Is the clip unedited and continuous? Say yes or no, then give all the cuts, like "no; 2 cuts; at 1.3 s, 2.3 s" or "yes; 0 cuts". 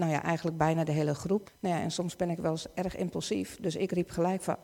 no; 1 cut; at 1.5 s